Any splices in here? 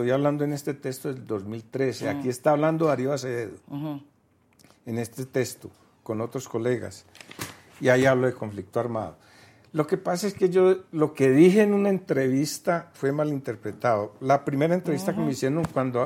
no; 0 cuts

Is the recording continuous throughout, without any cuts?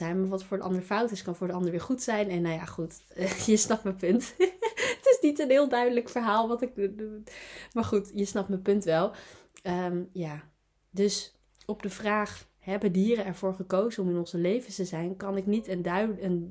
yes; 0 cuts

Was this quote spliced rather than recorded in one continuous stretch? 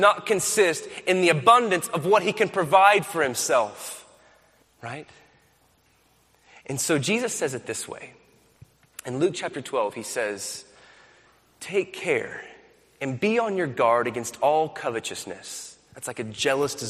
yes; 1 cut; at 4.6 s

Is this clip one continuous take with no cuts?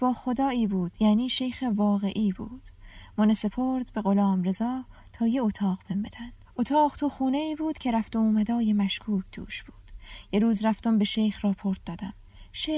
yes; 0 cuts

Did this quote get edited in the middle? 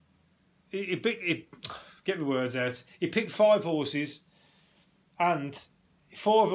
no; 0 cuts

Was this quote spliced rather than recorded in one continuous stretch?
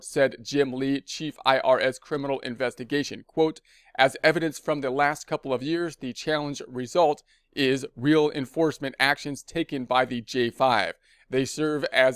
no; 0 cuts

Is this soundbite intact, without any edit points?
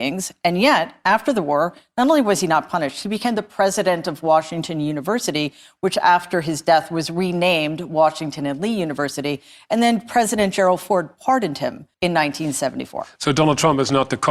no; 1 cut; at 11.9 s

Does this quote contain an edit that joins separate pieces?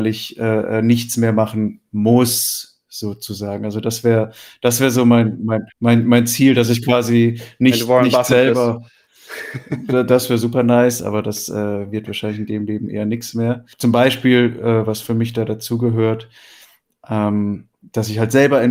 yes; 1 cut; at 5.7 s

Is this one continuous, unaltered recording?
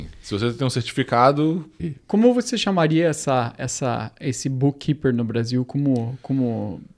no; 1 cut; at 1.8 s

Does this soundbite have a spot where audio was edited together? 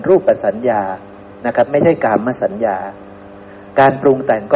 no; 0 cuts

